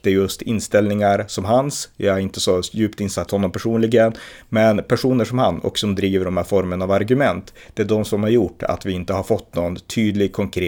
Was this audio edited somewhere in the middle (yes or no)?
yes